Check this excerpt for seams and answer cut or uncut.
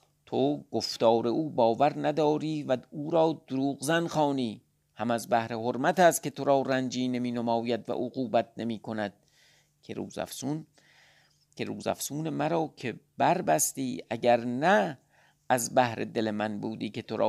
uncut